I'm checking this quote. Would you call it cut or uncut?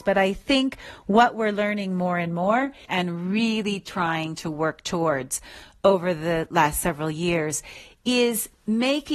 uncut